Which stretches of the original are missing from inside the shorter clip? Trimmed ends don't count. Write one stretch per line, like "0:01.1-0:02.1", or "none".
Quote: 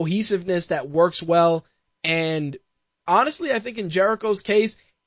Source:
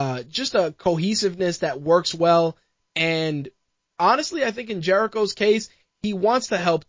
none